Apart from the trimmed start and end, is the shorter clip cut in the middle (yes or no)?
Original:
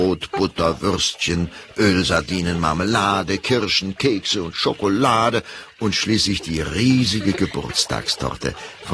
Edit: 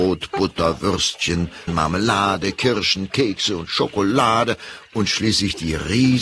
yes